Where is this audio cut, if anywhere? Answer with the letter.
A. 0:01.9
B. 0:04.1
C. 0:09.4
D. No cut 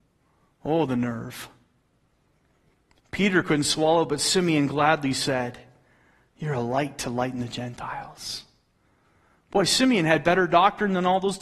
D